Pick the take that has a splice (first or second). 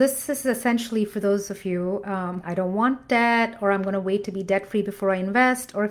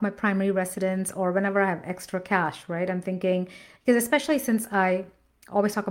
first